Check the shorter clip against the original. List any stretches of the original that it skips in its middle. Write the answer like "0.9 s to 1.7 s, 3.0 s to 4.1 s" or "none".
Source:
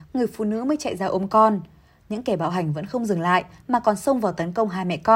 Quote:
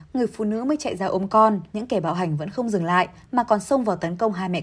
1.7 s to 2.1 s